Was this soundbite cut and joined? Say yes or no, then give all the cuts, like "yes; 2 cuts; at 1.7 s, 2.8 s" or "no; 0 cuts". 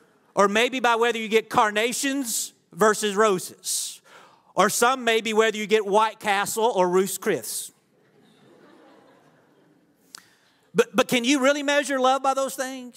no; 0 cuts